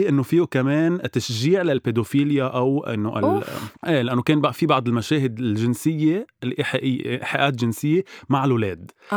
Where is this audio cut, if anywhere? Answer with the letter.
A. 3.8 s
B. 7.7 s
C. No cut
A